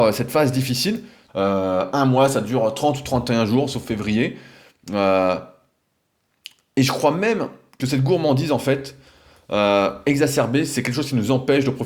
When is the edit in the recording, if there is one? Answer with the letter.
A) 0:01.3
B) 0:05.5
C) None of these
A